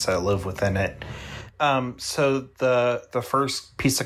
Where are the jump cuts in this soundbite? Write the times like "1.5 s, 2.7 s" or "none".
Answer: 1.5 s